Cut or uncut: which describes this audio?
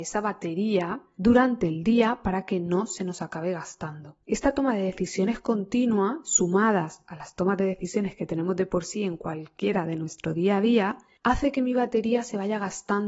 cut